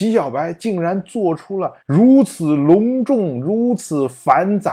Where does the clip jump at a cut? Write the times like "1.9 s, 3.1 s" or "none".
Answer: 1.8 s